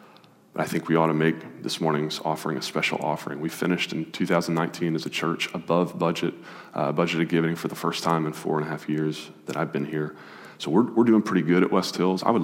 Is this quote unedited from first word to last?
yes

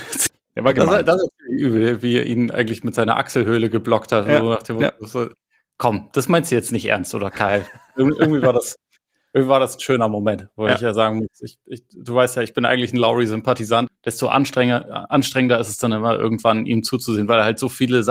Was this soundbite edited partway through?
yes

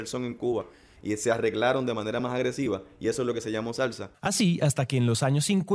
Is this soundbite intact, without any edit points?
no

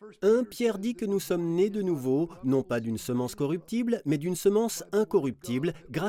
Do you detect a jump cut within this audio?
no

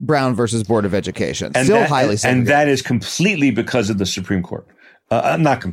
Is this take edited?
yes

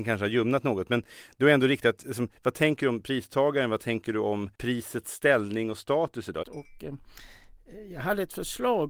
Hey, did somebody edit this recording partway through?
yes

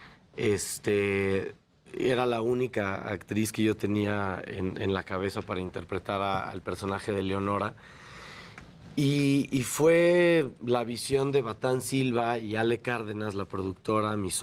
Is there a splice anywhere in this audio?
no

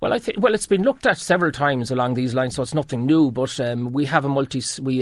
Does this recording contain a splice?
no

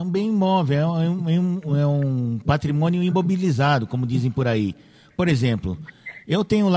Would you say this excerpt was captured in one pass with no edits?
yes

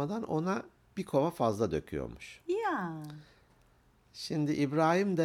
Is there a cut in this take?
no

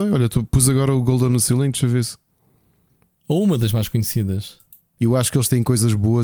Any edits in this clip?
yes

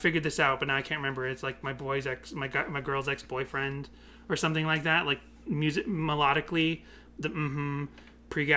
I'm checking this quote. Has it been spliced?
no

